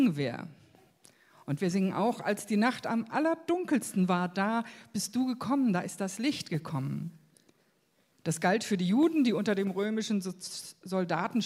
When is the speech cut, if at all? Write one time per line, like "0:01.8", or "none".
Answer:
none